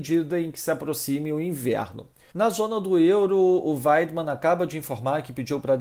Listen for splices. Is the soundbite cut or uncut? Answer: cut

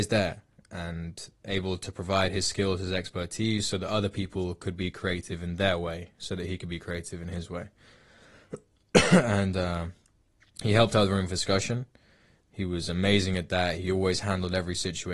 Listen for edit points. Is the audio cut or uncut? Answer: uncut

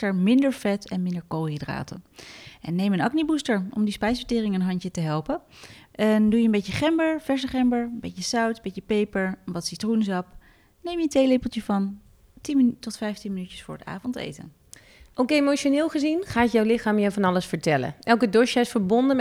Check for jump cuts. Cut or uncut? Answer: uncut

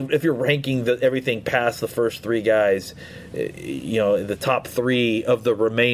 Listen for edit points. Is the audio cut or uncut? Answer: uncut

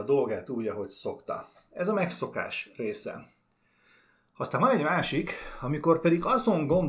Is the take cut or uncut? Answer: uncut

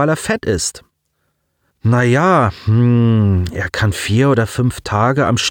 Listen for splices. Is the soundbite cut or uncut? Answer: cut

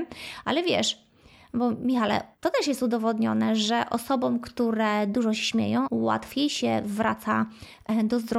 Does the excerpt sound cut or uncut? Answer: cut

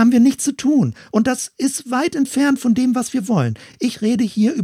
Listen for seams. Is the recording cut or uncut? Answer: uncut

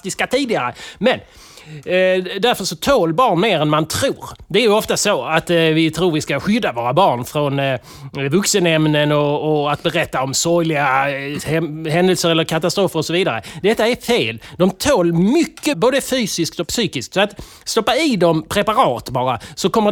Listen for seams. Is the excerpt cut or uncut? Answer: cut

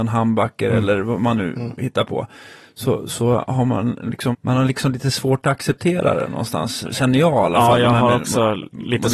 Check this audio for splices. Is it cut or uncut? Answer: cut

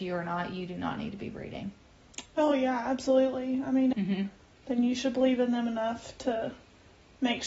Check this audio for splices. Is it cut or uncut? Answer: cut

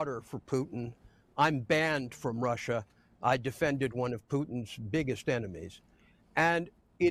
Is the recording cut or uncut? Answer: uncut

